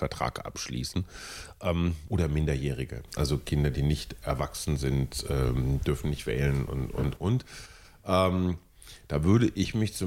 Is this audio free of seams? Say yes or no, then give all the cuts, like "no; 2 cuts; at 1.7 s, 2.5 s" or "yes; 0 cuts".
yes; 0 cuts